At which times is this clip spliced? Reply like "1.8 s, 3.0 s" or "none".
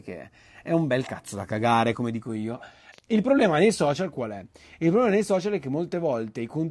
2.9 s